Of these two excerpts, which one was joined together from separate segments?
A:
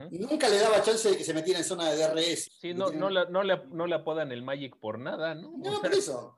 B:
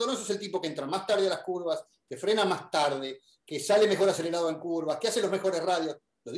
A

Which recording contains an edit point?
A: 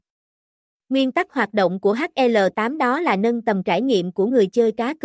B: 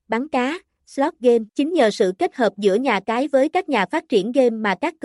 B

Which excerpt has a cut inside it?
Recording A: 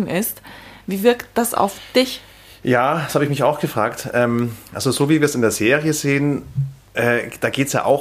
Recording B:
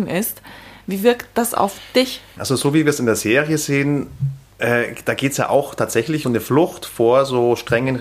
B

